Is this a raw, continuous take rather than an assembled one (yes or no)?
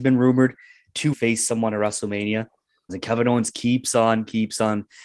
no